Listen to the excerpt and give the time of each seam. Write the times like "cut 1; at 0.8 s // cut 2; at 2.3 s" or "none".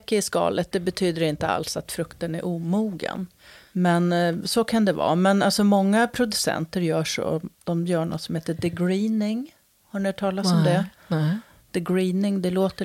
cut 1; at 7.5 s